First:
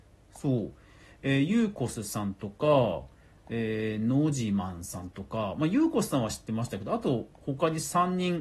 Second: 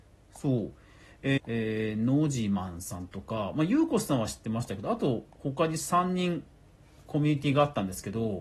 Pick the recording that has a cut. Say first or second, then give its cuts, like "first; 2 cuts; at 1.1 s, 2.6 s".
second; 1 cut; at 1.4 s